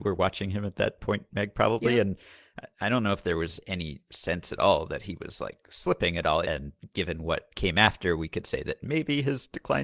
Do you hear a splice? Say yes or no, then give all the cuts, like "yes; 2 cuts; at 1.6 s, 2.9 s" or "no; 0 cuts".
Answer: yes; 1 cut; at 6.4 s